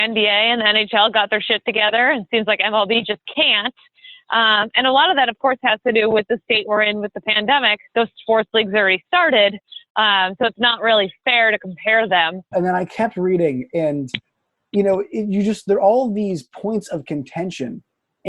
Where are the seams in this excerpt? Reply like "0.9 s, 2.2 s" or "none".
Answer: 7.9 s, 12.5 s